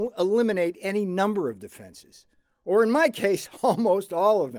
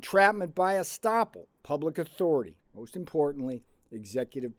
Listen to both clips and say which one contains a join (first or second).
second